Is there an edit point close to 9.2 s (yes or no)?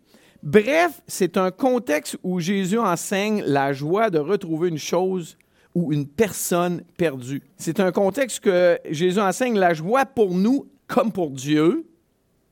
no